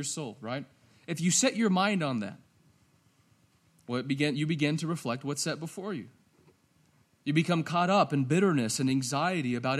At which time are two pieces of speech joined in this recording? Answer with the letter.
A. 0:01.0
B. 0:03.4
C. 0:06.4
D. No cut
D